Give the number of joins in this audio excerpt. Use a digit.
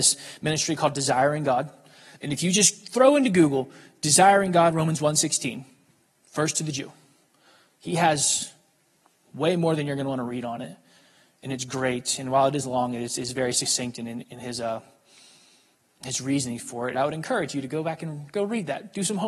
2